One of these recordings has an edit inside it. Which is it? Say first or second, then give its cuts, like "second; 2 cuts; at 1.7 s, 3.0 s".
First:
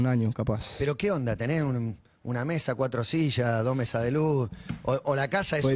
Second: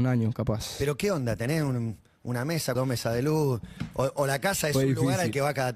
second; 1 cut; at 2.7 s